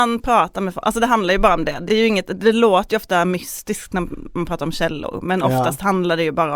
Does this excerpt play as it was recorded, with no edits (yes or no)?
yes